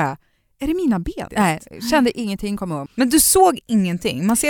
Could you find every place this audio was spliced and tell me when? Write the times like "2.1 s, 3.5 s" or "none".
1.3 s, 2.9 s